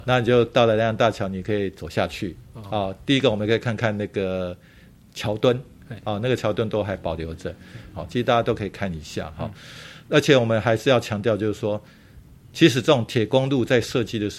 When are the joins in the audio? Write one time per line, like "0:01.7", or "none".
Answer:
0:07.9